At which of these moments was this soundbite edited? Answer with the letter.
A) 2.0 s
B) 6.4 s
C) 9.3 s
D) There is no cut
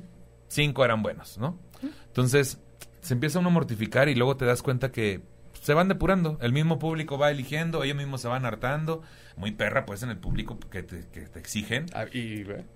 C